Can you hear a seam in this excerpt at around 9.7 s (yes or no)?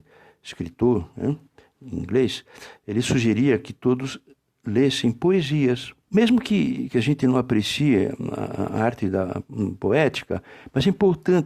no